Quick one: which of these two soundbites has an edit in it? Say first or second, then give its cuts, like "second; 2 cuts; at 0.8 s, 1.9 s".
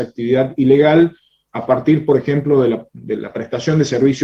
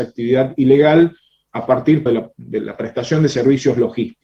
second; 1 cut; at 2.1 s